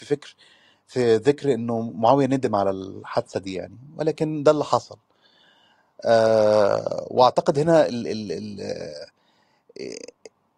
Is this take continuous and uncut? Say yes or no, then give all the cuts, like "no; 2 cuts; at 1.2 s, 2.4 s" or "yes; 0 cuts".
yes; 0 cuts